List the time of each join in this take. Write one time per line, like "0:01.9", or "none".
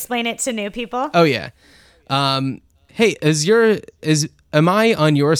none